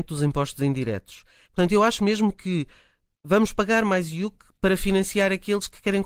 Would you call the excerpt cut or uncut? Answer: cut